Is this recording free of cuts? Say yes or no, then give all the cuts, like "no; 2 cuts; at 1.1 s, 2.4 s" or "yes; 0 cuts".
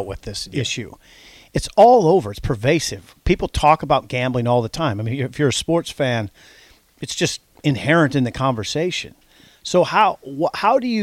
yes; 0 cuts